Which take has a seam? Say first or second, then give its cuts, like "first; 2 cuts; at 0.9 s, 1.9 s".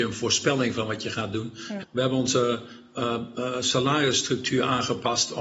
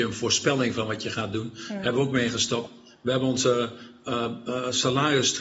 first; 1 cut; at 1.8 s